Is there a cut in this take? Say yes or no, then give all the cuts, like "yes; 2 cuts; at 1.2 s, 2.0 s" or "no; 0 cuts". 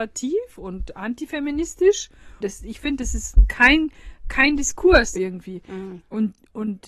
yes; 2 cuts; at 2.4 s, 5.2 s